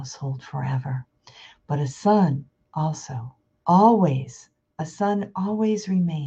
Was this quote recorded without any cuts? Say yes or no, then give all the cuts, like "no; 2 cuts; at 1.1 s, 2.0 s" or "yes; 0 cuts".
yes; 0 cuts